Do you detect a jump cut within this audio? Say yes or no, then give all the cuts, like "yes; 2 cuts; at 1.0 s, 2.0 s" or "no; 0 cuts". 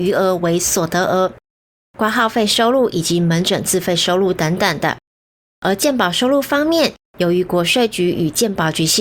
yes; 1 cut; at 1.8 s